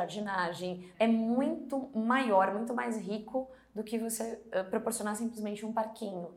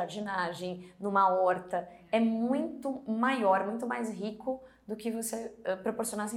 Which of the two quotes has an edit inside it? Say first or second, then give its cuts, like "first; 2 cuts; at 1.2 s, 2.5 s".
first; 1 cut; at 0.9 s